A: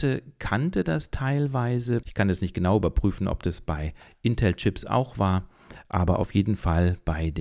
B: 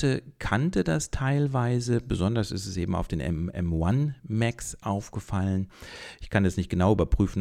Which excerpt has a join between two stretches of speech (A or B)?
A